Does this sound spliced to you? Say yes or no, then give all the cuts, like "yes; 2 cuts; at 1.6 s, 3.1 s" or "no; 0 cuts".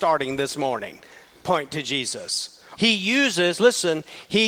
yes; 1 cut; at 2.8 s